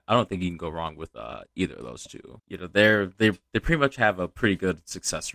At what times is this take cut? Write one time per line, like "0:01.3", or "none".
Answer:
0:02.4